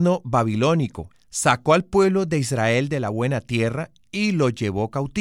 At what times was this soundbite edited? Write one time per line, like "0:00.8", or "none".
0:01.1